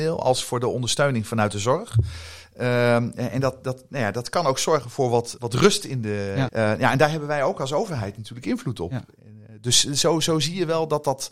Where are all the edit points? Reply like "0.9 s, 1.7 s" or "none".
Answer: 5.4 s, 6.5 s